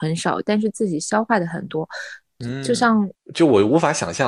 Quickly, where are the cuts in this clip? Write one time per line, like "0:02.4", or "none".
0:03.2